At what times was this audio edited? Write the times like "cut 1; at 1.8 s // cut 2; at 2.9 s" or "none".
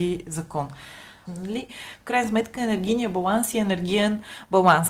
cut 1; at 1.3 s